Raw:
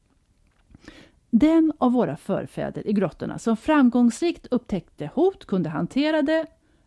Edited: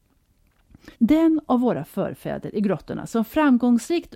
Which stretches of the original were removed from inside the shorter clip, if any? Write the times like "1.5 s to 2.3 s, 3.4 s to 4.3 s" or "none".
0.9 s to 1.2 s